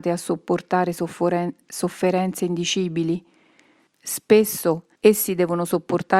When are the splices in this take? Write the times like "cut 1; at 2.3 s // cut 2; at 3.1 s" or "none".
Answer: cut 1; at 3.9 s // cut 2; at 4.9 s